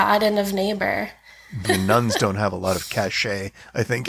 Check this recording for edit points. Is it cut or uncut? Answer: cut